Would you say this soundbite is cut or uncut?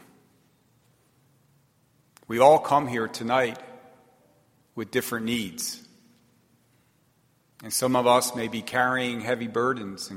uncut